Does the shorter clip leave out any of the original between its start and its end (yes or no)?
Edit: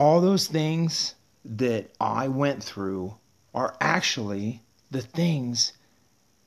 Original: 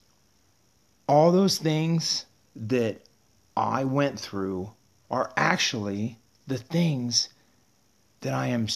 yes